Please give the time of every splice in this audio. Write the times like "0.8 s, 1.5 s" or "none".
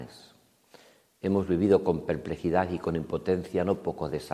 none